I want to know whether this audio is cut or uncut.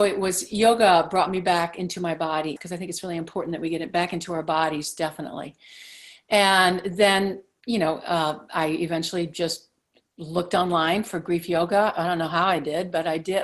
cut